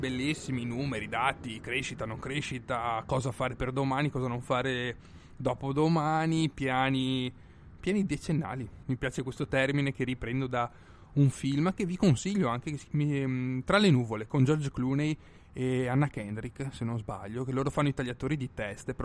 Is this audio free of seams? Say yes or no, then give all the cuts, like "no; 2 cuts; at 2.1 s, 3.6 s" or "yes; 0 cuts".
no; 1 cut; at 8.8 s